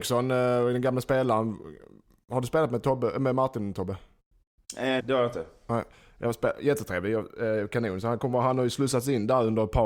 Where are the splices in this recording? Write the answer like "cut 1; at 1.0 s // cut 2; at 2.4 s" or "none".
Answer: cut 1; at 5.0 s